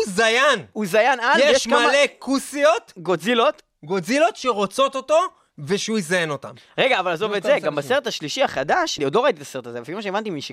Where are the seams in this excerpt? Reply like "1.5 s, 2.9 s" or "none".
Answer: 9.0 s